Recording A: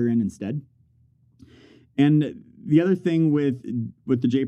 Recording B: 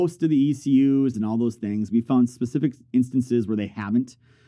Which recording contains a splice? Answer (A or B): B